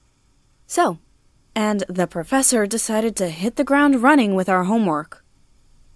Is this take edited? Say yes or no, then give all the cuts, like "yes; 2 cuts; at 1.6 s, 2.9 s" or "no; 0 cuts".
yes; 1 cut; at 1.4 s